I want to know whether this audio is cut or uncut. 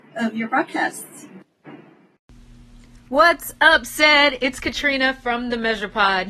uncut